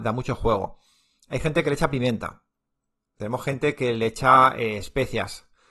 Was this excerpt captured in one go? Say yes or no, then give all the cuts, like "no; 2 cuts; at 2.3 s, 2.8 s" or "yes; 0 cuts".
yes; 0 cuts